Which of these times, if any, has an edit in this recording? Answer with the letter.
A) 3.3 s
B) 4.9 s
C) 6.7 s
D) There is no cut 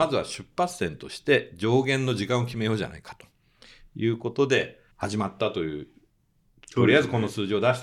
B